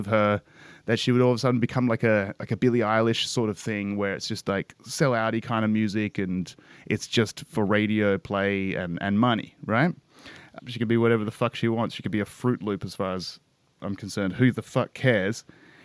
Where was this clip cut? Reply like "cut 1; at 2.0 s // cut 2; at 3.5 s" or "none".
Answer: cut 1; at 10.6 s